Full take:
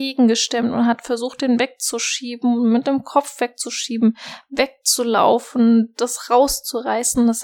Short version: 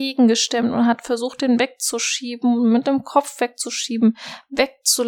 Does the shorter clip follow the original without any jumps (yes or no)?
yes